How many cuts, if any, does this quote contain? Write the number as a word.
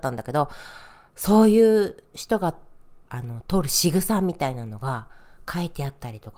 one